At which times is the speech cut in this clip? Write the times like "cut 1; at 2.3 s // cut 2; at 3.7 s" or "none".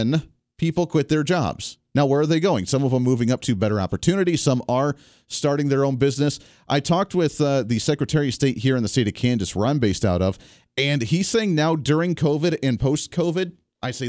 none